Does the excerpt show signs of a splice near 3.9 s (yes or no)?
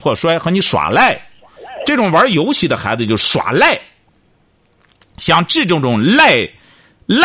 no